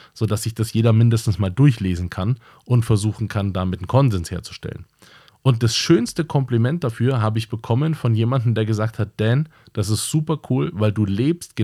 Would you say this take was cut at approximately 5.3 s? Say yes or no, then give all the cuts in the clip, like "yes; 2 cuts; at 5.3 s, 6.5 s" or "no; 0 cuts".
yes; 1 cut; at 5.3 s